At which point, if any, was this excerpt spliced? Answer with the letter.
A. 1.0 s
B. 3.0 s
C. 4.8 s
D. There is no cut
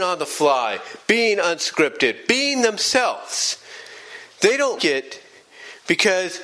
C